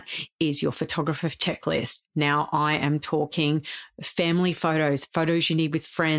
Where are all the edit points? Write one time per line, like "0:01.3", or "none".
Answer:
none